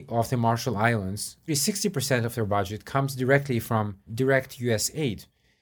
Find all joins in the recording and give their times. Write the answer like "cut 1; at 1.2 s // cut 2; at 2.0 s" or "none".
cut 1; at 1.5 s // cut 2; at 4.1 s